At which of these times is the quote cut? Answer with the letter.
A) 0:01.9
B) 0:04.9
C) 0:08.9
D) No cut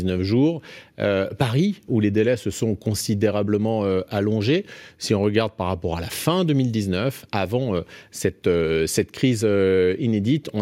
A